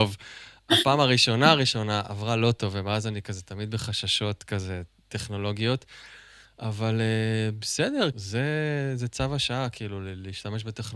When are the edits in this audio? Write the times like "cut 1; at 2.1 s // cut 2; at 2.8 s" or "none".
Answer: cut 1; at 8.1 s